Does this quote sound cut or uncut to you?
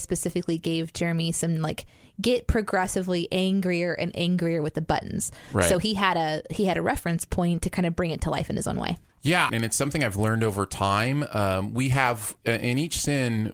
cut